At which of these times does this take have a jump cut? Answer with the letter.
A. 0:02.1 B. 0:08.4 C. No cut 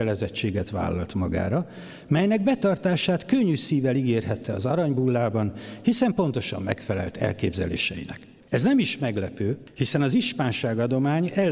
B